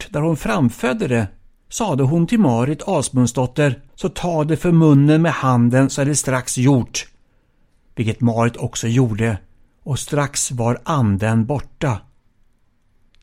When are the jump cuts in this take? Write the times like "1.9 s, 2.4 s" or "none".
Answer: 3.9 s